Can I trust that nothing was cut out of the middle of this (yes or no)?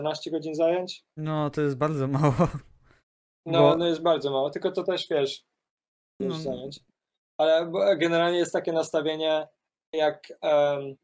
no